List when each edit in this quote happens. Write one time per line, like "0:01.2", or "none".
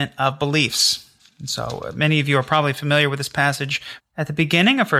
0:04.0